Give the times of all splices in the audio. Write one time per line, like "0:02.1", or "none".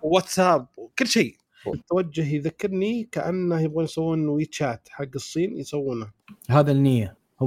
0:01.7